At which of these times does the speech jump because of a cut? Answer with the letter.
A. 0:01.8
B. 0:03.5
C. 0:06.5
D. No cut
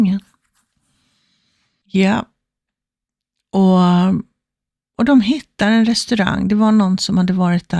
A